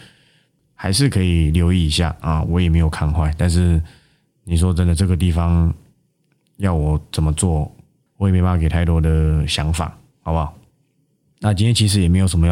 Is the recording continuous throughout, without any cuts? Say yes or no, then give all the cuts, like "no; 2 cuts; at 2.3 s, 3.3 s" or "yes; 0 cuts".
yes; 0 cuts